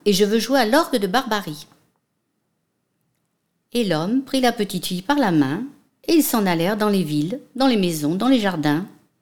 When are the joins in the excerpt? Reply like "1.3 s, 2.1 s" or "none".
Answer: none